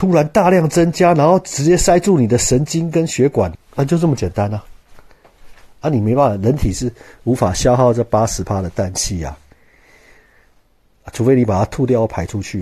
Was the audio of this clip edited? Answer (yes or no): yes